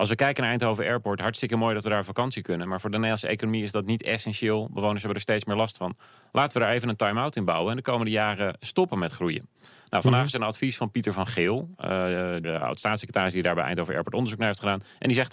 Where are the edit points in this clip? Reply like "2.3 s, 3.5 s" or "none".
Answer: 12.4 s